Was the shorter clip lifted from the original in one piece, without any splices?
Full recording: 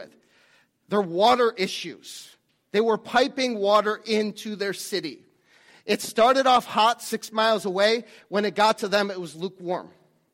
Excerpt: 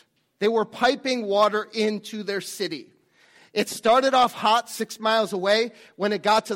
yes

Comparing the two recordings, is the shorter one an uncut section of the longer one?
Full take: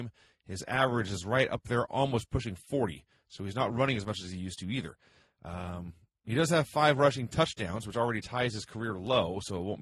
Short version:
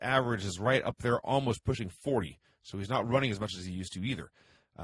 yes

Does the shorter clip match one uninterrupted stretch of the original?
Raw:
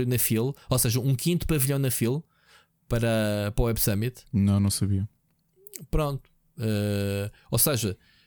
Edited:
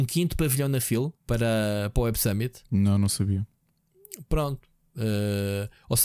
no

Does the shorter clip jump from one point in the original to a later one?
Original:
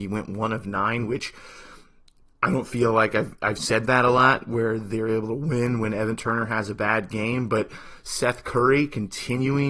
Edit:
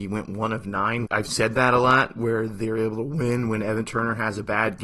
yes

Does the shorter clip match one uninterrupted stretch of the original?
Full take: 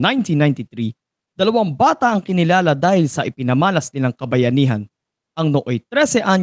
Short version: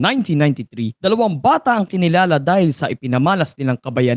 no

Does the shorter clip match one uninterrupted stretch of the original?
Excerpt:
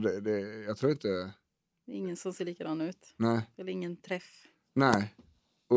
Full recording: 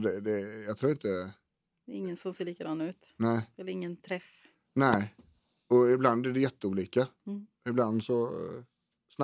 yes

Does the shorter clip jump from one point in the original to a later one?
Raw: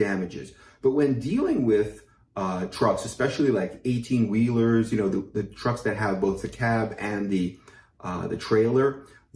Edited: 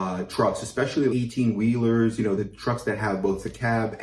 yes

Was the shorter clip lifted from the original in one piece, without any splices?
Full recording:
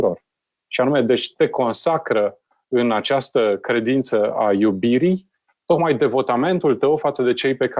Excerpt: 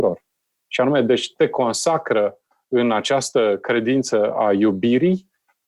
yes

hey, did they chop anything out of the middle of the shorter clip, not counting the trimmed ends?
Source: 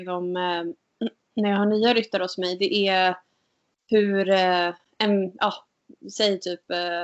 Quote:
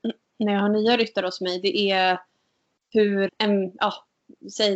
yes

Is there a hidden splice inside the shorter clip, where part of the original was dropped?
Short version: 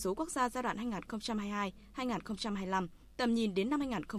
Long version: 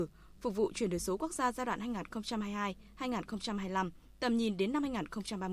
no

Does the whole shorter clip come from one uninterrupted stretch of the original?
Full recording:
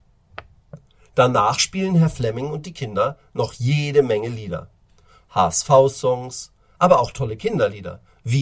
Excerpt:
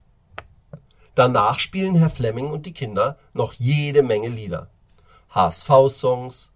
yes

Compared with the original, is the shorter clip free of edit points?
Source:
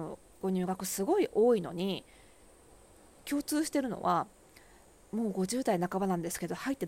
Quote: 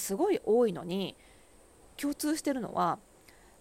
no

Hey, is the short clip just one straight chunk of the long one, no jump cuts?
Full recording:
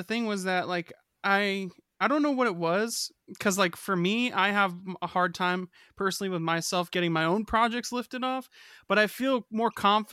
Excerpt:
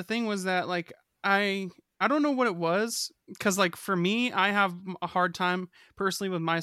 yes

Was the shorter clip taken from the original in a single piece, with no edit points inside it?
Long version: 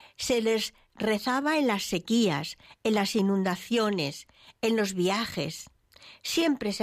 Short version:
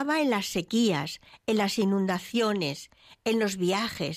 yes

